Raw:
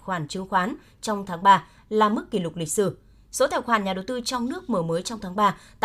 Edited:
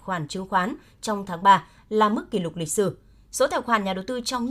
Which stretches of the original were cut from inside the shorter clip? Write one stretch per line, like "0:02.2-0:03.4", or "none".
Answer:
none